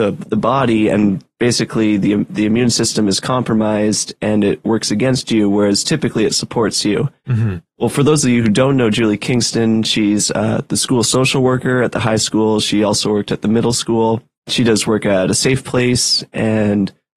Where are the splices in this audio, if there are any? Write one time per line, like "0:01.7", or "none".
none

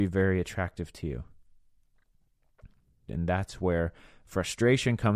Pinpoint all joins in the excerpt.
0:03.1

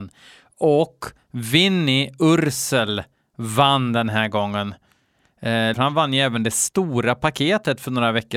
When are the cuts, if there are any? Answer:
0:05.7

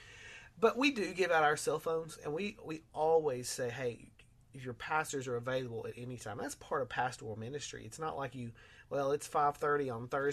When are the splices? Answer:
none

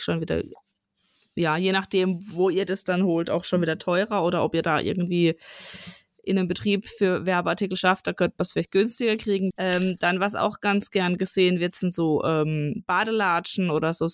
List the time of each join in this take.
0:09.5

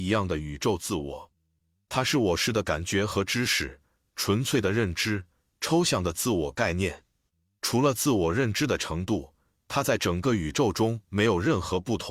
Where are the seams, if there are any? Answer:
none

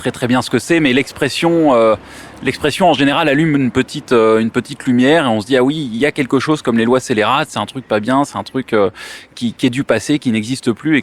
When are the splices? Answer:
0:09.6

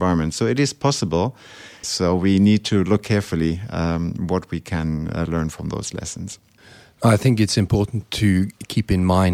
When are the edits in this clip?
0:01.8

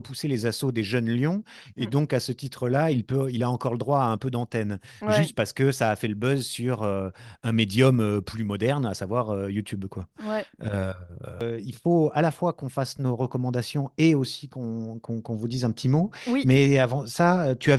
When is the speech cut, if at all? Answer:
none

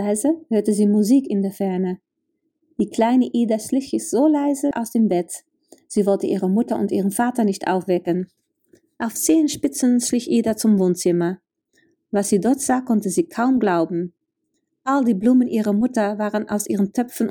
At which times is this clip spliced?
0:04.7

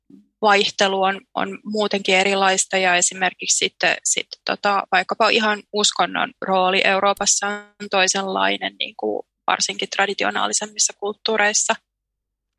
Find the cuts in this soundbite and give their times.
none

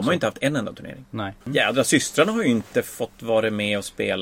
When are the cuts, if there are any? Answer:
0:01.4

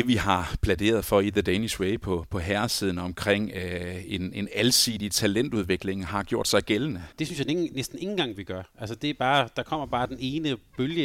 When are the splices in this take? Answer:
0:07.1

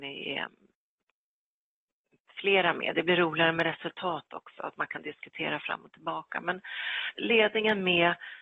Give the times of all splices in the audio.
0:07.2

